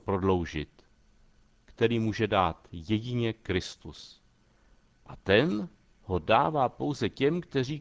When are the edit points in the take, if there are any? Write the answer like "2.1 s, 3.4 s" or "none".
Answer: 1.6 s